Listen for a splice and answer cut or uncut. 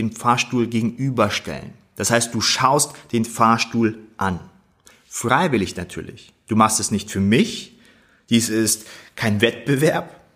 uncut